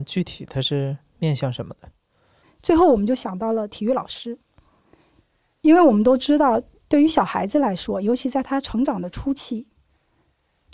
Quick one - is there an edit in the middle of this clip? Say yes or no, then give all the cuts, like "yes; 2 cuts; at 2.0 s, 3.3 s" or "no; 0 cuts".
yes; 1 cut; at 2.4 s